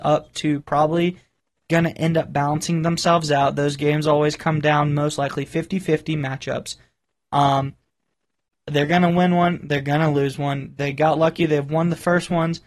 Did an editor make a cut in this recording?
no; 0 cuts

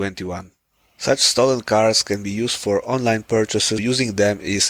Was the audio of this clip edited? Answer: yes; 1 cut; at 3.8 s

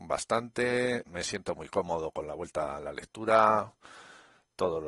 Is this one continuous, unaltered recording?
no; 1 cut; at 1.1 s

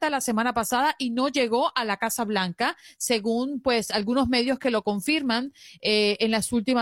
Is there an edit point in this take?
no; 0 cuts

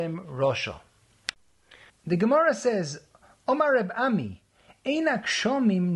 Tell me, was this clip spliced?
yes; 1 cut; at 1.9 s

